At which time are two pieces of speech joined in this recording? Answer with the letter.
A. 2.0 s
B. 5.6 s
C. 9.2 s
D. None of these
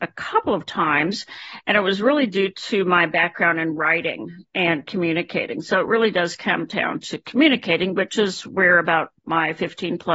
C